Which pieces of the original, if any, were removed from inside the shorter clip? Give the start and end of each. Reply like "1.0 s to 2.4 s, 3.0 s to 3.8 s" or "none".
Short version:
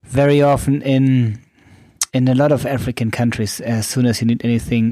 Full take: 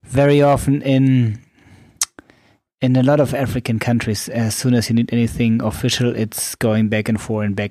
2.1 s to 2.8 s